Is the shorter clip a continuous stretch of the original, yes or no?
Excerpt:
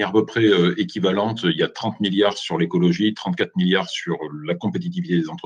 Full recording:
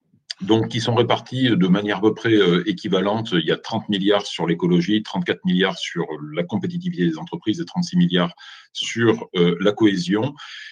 yes